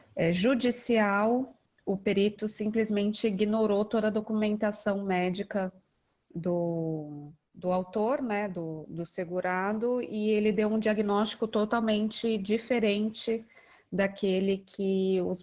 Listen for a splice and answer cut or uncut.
uncut